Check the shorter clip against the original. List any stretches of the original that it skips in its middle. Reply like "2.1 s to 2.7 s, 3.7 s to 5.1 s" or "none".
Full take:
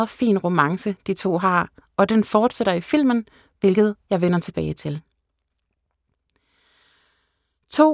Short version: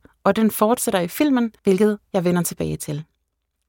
3.3 s to 3.6 s